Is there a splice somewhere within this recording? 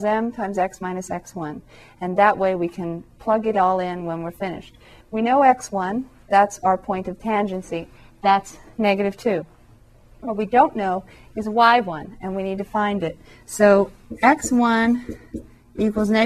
no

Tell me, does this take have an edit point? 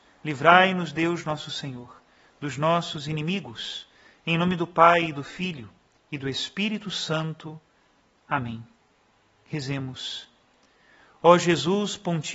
no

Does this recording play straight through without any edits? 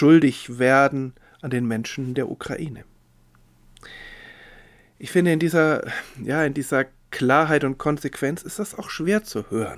yes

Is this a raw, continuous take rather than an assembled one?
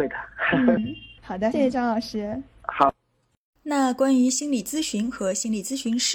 no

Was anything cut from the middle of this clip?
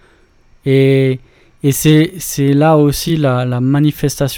no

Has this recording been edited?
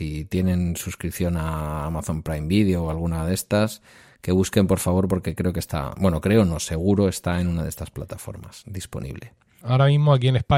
yes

